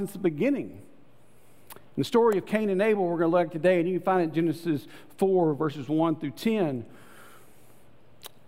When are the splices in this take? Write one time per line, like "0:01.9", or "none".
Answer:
none